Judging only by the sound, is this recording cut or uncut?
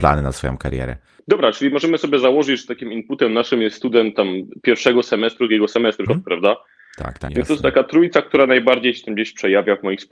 cut